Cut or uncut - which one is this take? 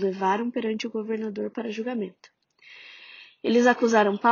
uncut